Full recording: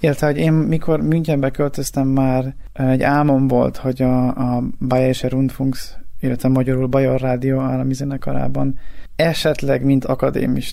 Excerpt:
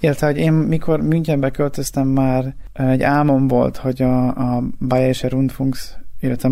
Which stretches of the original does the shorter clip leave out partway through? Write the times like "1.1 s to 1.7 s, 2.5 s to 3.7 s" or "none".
none